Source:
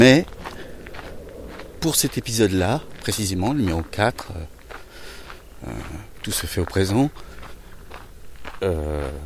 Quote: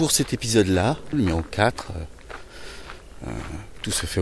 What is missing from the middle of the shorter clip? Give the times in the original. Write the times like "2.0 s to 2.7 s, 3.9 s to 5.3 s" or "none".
3.0 s to 3.5 s